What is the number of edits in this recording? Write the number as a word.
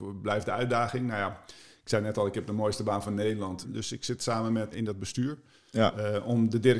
two